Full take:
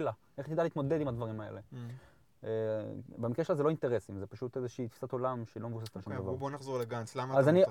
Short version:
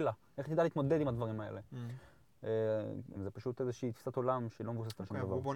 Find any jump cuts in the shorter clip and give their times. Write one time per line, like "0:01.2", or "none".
0:03.2